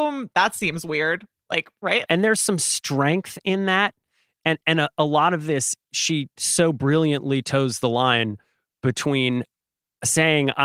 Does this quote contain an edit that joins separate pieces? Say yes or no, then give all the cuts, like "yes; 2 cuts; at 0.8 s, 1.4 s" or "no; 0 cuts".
yes; 1 cut; at 2.1 s